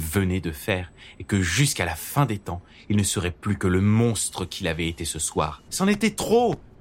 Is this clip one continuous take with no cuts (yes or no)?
no